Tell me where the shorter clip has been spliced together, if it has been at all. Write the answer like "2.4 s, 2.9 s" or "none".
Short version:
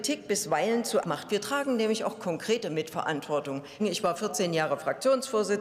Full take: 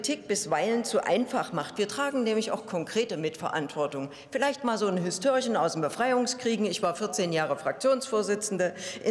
1.0 s, 3.8 s